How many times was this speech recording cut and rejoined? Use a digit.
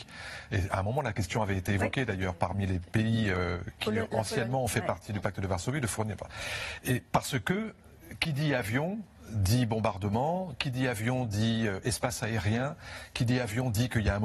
0